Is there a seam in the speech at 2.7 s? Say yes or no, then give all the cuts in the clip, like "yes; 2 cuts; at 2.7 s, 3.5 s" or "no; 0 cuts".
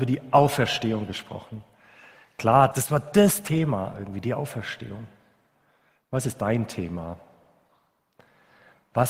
yes; 1 cut; at 2.7 s